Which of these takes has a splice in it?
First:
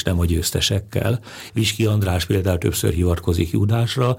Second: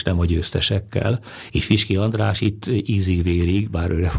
first; 1 cut; at 1.5 s

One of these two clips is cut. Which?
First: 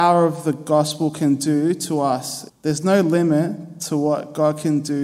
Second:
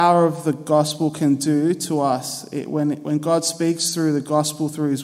first; 1 cut; at 2.5 s

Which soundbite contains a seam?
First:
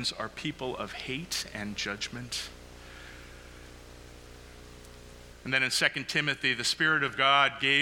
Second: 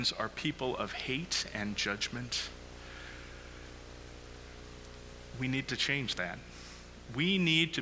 first; 1 cut; at 5.3 s

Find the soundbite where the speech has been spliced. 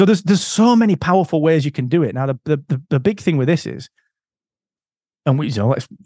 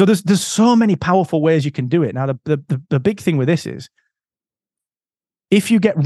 first; 1 cut; at 5.1 s

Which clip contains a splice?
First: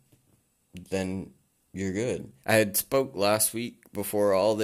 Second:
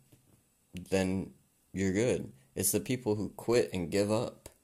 first; 1 cut; at 2.4 s

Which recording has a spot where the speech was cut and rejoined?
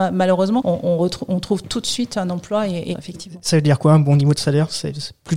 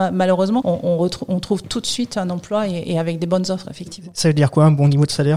first; 1 cut; at 2.9 s

